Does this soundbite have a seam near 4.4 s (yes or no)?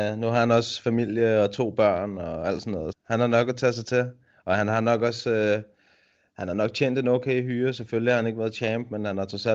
no